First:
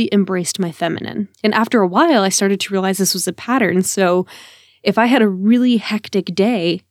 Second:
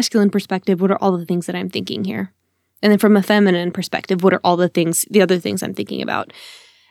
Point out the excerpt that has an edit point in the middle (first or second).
first